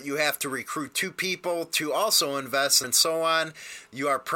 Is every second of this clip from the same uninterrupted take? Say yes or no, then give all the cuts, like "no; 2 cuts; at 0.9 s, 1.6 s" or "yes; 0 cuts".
no; 1 cut; at 2.8 s